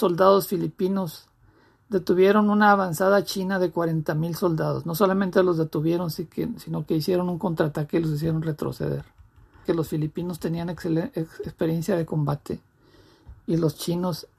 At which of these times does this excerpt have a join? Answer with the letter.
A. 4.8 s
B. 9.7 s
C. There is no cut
B